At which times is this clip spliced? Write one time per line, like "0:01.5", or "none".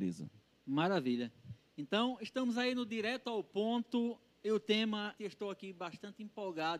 0:05.2